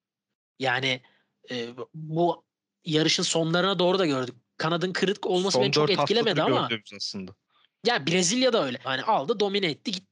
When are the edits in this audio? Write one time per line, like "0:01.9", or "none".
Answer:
0:08.8